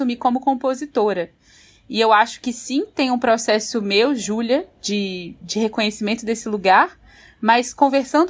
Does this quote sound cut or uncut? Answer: uncut